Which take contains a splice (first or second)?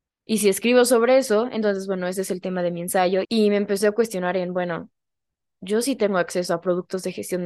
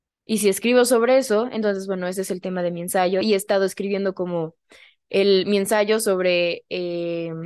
first